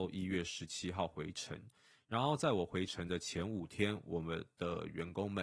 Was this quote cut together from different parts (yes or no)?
no